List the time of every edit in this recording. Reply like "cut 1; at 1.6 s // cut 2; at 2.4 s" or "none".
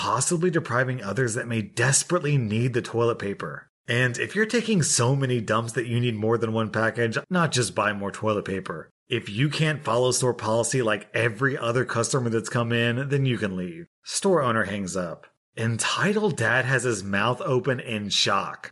cut 1; at 7.2 s